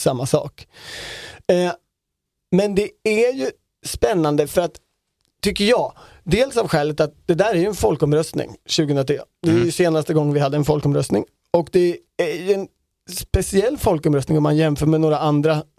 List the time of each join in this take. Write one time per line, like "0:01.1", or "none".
none